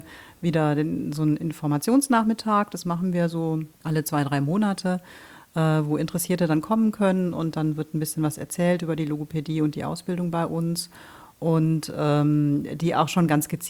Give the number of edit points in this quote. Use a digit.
0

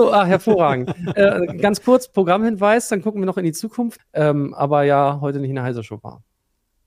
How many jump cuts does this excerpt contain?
1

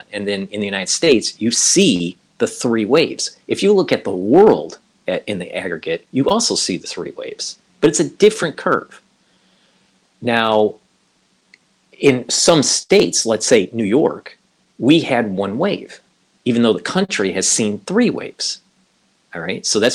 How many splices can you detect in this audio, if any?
0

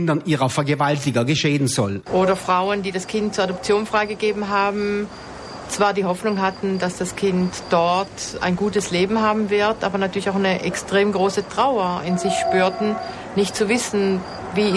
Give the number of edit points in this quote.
1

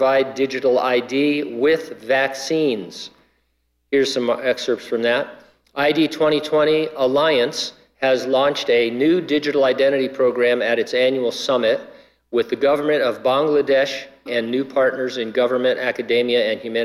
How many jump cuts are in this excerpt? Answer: 1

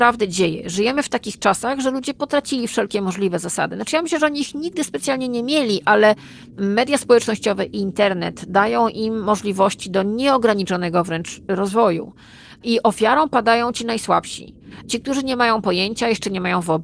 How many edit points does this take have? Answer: 0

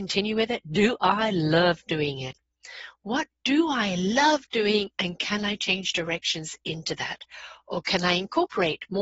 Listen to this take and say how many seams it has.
0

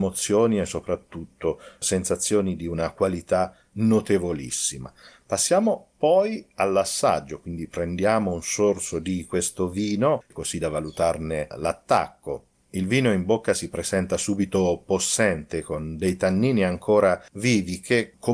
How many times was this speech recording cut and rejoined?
0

